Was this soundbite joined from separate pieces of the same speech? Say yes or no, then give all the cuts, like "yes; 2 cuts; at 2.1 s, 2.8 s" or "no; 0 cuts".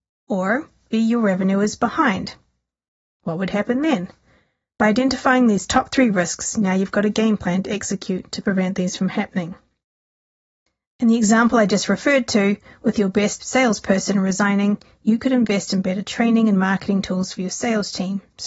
yes; 2 cuts; at 0.9 s, 3.1 s